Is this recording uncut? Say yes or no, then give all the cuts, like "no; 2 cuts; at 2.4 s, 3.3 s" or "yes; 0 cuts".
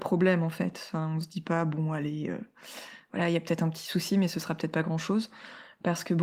yes; 0 cuts